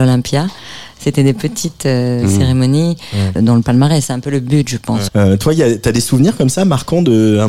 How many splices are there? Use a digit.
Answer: 2